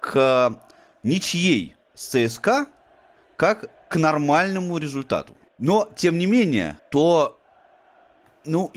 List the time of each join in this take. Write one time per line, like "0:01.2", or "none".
0:05.5
0:06.8